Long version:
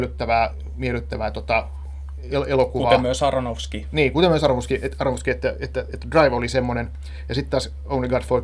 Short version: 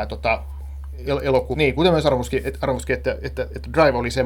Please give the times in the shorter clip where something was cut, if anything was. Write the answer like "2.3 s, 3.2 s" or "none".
1.5 s